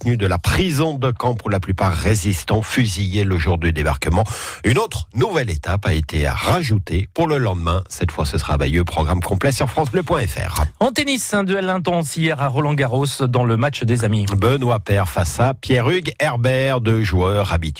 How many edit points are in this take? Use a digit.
0